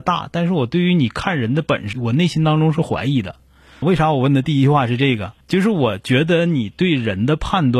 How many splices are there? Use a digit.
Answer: 3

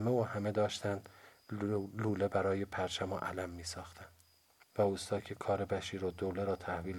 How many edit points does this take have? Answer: 1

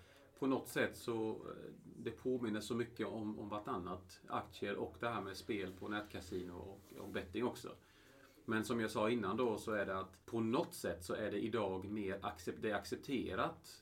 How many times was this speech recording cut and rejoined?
1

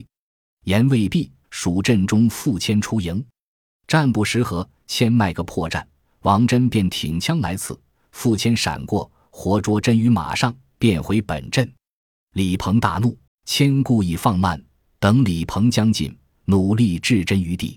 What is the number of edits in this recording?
2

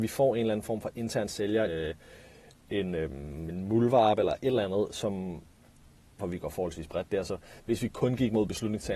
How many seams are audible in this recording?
2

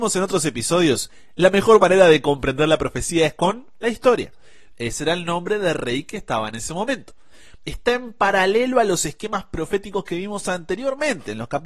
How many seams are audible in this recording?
2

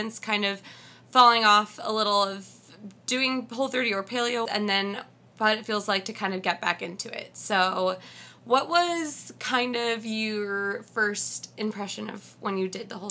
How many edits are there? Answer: 1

